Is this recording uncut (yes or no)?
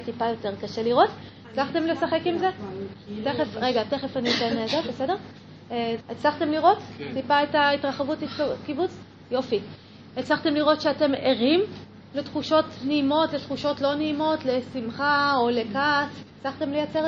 no